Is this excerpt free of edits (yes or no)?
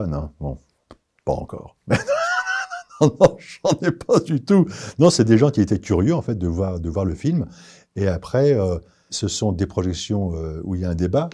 no